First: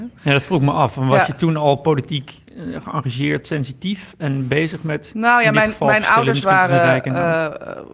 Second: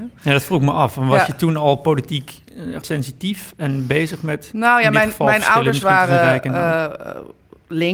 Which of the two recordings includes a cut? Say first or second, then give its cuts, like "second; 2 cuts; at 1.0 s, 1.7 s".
second; 1 cut; at 2.8 s